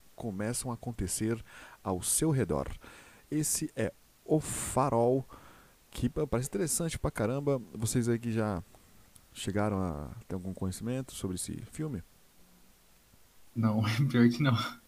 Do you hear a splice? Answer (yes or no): no